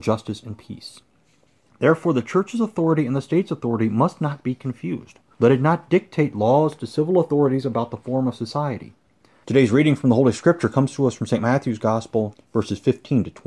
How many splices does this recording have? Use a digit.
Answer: 3